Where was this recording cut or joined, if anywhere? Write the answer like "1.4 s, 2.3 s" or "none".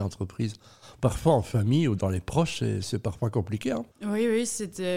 3.9 s